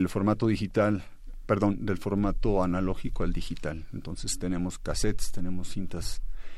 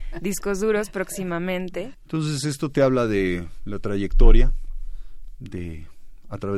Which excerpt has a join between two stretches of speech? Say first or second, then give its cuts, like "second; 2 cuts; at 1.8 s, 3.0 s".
second; 1 cut; at 1.9 s